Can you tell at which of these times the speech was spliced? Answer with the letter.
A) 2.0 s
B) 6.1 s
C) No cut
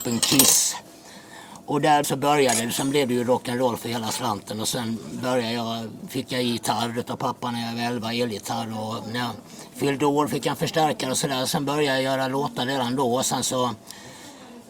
A